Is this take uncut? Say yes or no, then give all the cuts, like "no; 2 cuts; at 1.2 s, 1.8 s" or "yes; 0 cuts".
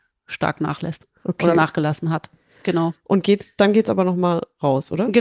no; 1 cut; at 2.6 s